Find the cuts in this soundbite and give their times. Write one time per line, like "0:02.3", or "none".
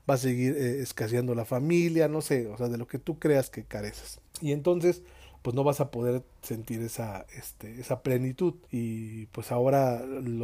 0:04.3
0:08.7